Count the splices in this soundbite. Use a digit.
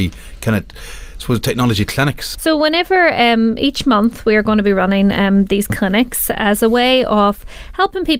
1